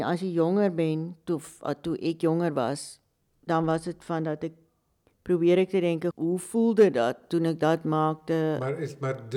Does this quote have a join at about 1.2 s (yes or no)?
no